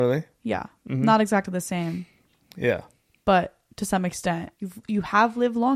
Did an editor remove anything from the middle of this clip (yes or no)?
yes